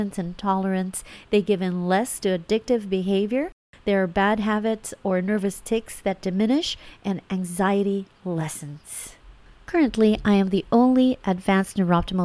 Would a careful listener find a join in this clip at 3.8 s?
yes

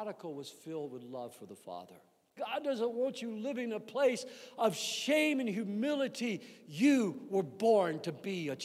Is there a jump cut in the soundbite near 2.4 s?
yes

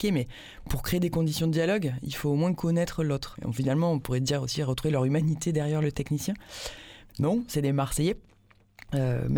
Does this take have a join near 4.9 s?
no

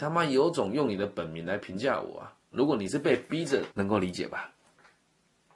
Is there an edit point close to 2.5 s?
yes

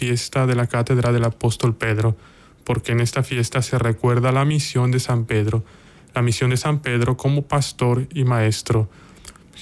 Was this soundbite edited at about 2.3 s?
no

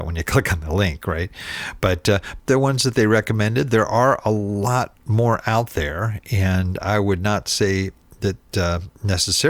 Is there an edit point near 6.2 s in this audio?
no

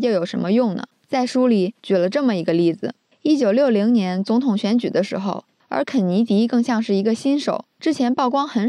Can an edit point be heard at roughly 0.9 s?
yes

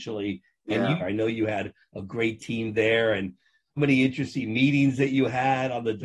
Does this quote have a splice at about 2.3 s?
no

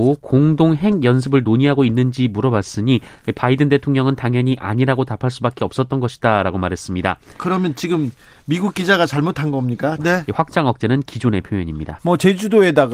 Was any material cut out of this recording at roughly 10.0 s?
yes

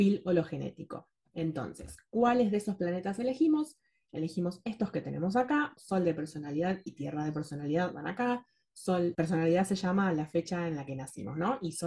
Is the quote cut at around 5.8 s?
yes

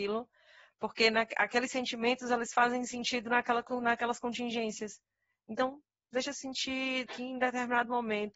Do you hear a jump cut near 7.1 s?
yes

